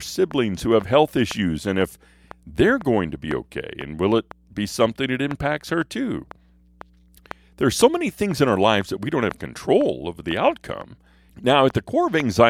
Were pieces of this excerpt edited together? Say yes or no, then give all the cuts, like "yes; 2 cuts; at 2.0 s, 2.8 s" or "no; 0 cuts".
yes; 1 cut; at 11.3 s